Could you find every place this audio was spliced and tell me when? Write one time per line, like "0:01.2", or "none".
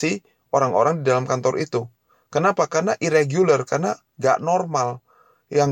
none